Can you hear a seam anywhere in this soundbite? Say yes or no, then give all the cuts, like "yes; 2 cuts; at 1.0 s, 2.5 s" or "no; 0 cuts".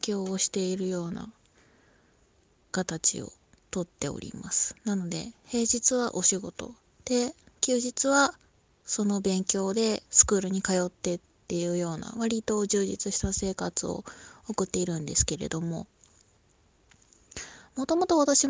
no; 0 cuts